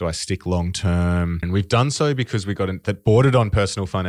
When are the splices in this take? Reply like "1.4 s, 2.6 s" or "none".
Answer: 1.4 s, 2.8 s